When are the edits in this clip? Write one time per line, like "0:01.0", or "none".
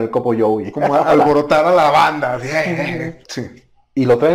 0:03.2